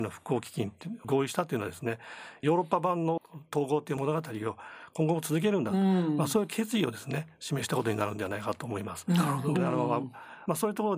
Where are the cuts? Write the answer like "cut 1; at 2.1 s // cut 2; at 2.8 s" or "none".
cut 1; at 9.5 s